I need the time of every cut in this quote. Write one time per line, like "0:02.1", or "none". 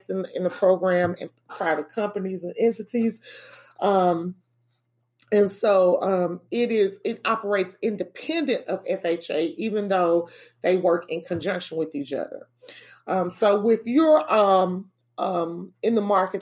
none